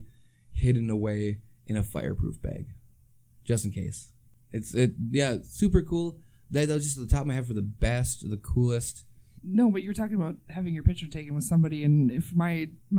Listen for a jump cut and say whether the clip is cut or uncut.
cut